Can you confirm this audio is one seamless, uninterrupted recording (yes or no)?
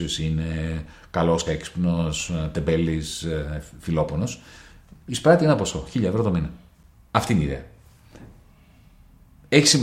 no